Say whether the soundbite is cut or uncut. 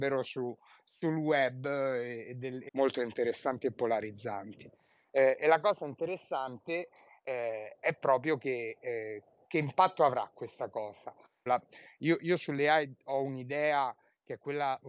cut